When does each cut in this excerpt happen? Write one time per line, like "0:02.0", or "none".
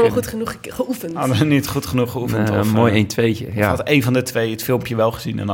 none